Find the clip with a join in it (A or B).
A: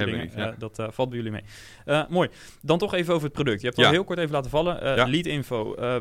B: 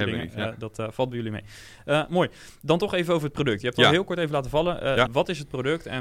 B